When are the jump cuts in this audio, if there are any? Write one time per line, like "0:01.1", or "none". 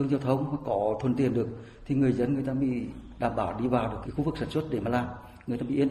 0:04.0